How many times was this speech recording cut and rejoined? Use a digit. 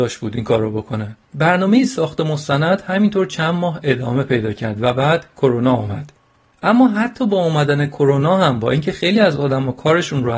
1